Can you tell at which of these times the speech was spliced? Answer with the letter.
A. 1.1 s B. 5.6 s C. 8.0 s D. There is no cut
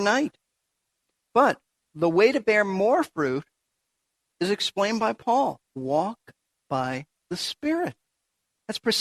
B